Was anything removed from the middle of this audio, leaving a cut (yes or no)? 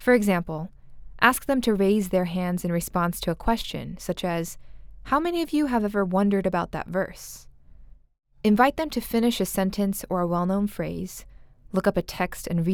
no